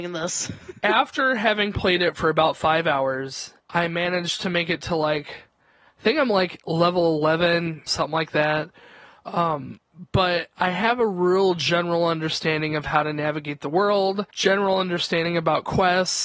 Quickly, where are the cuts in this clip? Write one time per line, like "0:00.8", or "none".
0:03.6
0:07.9
0:14.3